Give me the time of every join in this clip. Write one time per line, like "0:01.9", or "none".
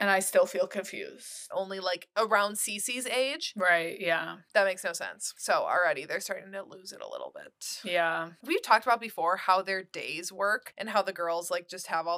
0:01.5